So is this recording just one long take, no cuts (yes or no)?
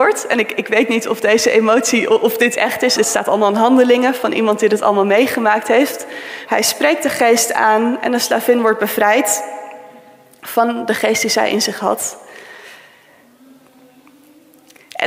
no